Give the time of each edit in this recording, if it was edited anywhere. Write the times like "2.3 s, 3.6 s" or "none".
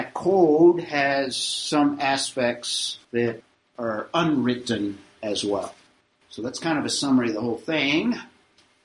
3.0 s